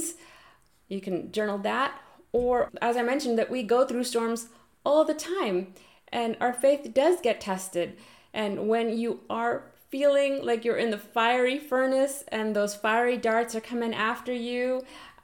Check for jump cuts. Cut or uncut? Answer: cut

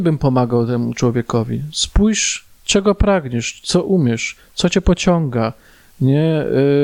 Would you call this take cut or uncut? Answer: uncut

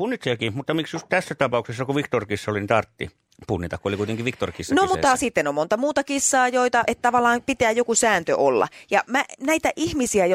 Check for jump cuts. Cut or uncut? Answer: cut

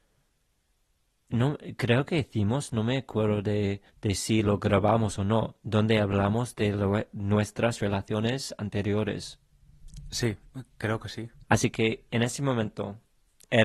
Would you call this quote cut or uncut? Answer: cut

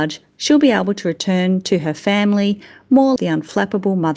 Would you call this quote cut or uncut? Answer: cut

